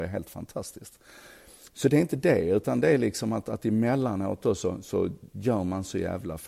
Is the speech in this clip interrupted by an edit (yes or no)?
no